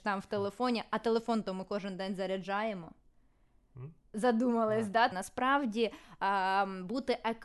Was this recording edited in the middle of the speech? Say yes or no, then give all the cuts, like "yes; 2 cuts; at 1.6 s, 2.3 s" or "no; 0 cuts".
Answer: yes; 1 cut; at 5.1 s